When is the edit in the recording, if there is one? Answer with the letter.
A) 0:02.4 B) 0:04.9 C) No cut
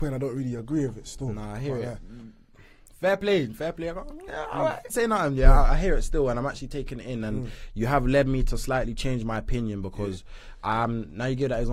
B